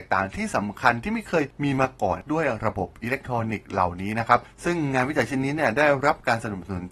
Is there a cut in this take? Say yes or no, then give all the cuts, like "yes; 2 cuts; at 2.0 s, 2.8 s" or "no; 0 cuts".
no; 0 cuts